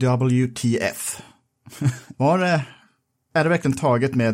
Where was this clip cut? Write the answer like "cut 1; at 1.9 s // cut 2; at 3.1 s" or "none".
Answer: cut 1; at 2.1 s

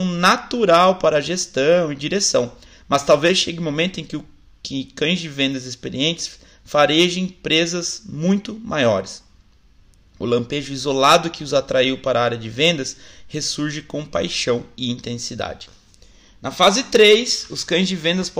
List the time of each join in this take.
none

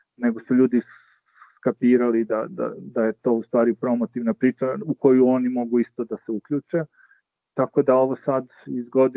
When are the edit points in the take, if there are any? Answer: none

